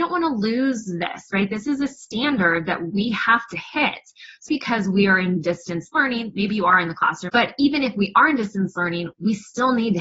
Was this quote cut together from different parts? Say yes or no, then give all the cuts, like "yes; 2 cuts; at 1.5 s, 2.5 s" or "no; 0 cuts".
yes; 2 cuts; at 4.5 s, 7.3 s